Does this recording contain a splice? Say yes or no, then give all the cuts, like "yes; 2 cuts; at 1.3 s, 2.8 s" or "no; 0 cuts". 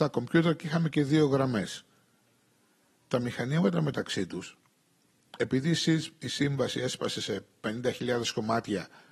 no; 0 cuts